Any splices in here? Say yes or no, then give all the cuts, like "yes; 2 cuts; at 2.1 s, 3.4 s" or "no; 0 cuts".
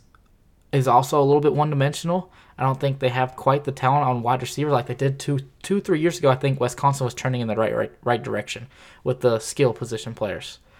no; 0 cuts